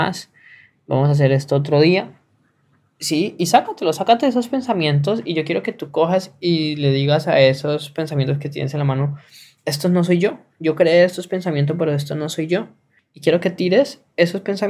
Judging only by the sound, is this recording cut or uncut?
uncut